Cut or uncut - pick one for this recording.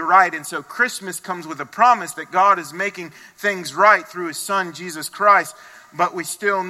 uncut